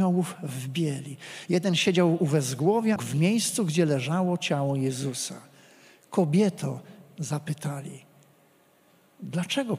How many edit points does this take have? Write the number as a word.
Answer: one